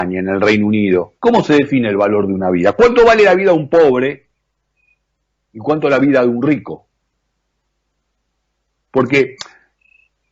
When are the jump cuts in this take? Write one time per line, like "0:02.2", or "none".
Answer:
0:01.2